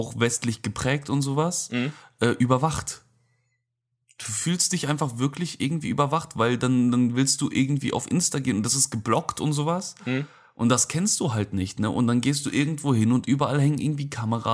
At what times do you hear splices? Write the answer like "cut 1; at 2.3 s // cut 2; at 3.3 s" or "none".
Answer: none